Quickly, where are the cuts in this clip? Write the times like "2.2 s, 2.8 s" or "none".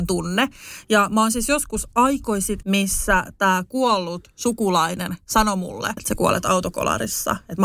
2.6 s, 6.0 s

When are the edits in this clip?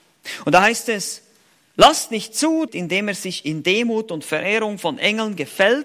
2.7 s

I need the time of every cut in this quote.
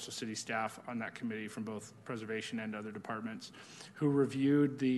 none

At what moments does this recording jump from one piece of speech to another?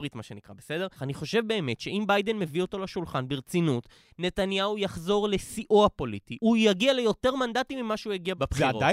1.0 s

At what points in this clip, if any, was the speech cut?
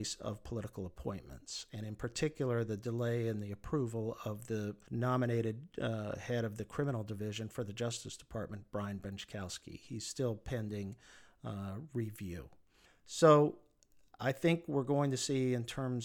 none

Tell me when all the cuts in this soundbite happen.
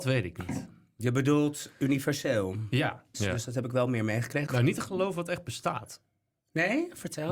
3.1 s, 4.5 s

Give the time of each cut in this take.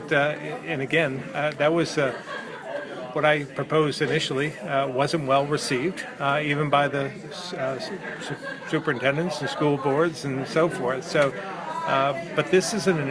none

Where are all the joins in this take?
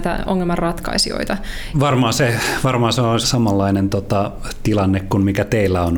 1.7 s, 3.2 s

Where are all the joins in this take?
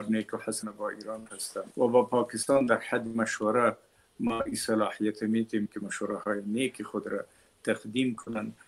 1.7 s

